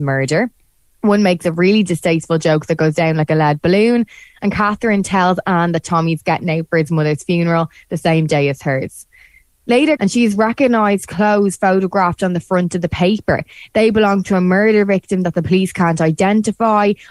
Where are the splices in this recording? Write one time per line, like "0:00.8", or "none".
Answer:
0:10.0